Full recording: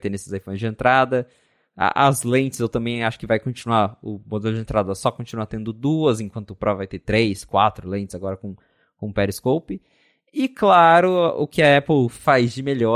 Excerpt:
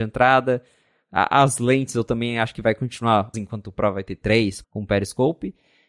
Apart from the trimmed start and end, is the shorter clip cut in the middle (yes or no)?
yes